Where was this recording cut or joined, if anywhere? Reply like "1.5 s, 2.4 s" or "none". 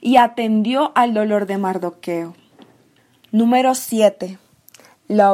none